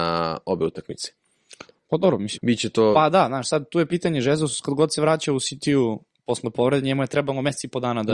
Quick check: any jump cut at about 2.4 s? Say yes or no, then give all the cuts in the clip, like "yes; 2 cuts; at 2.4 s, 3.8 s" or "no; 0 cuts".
yes; 1 cut; at 2.4 s